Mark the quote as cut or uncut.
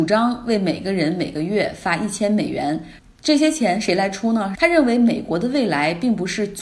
cut